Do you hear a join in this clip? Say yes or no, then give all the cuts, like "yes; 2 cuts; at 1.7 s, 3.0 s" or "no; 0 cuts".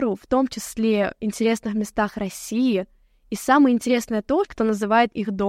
yes; 1 cut; at 4.4 s